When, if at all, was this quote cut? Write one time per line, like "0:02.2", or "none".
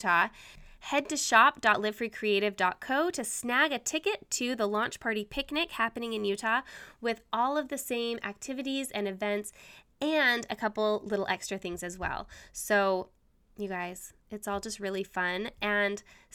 none